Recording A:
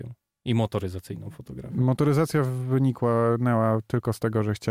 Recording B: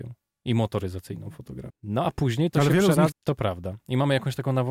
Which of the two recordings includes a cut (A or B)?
B